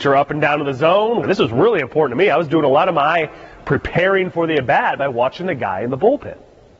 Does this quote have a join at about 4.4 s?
no; 1 cut; at 1.2 s

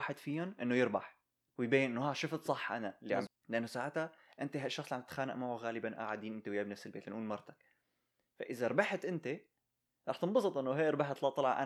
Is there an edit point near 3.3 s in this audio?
yes; 1 cut; at 3.3 s

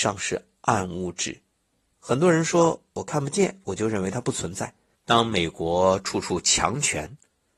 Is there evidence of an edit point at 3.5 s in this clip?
no; 2 cuts; at 1.9 s, 4.9 s

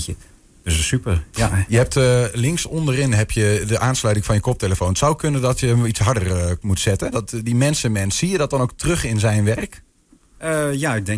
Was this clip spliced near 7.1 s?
yes; 1 cut; at 7.1 s

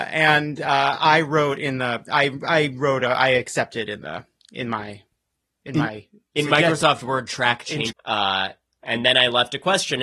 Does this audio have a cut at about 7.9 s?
yes; 1 cut; at 7.9 s

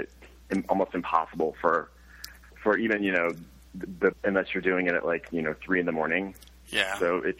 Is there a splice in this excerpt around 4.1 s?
yes; 1 cut; at 4.1 s

